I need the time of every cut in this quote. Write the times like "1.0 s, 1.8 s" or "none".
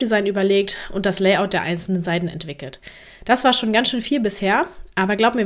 none